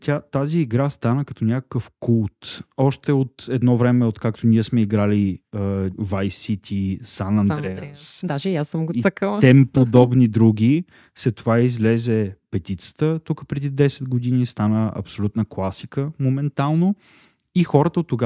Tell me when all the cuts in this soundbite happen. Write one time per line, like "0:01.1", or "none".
0:05.9